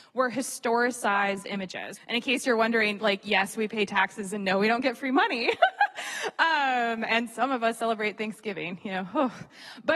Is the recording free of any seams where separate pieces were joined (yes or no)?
no